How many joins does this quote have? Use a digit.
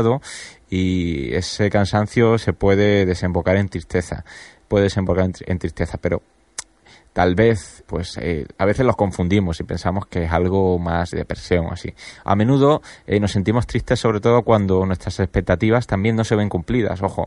2